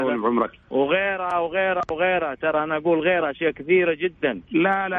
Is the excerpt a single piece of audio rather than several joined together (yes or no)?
yes